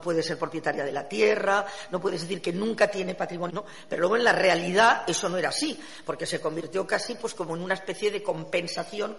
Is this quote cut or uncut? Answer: cut